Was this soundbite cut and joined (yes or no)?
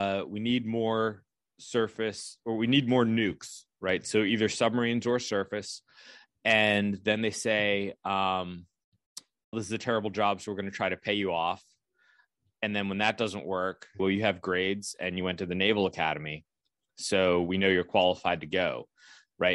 yes